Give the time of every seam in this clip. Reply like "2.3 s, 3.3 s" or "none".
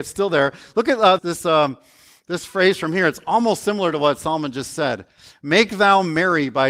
1.2 s